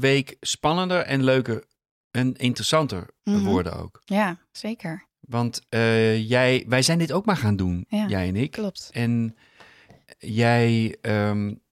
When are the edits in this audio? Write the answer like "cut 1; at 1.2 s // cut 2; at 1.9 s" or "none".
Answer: none